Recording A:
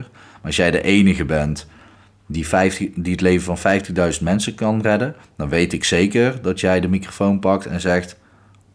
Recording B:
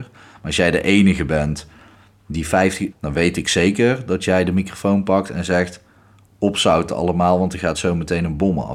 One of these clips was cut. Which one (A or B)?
B